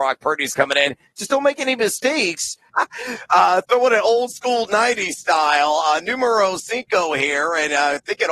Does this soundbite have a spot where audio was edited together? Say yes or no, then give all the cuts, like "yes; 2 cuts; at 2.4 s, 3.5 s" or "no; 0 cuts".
yes; 1 cut; at 2.7 s